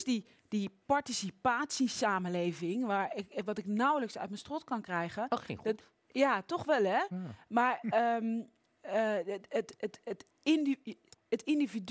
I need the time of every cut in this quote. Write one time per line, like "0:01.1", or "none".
none